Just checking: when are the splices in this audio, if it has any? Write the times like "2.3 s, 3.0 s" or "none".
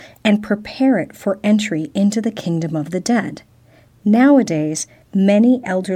5.0 s